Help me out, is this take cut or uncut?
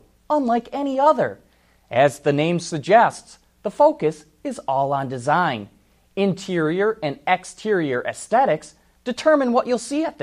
uncut